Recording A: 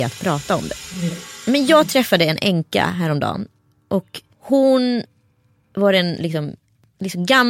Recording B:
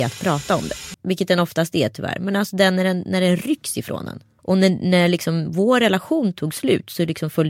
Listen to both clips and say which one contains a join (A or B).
B